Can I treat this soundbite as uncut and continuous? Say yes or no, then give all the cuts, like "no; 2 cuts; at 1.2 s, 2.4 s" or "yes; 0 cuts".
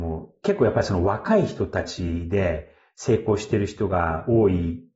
yes; 0 cuts